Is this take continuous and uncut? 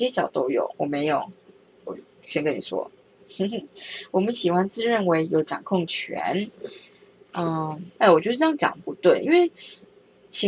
no; 1 cut; at 8.0 s

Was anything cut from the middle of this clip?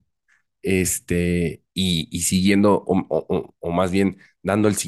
no; 0 cuts

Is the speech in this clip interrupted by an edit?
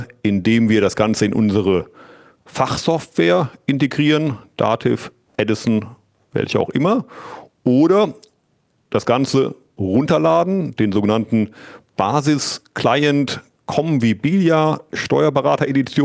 no; 0 cuts

